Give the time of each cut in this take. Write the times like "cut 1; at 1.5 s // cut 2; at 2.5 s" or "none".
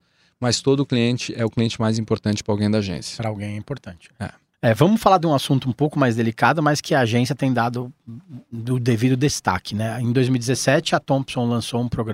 none